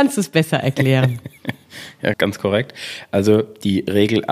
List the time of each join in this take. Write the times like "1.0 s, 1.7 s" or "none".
2.1 s